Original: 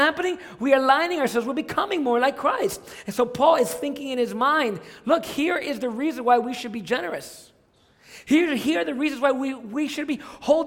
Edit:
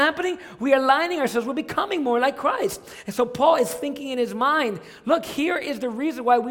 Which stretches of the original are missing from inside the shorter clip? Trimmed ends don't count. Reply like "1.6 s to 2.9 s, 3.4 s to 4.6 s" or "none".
none